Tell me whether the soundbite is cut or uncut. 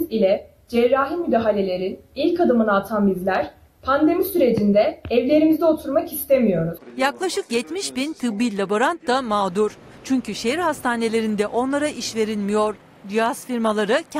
uncut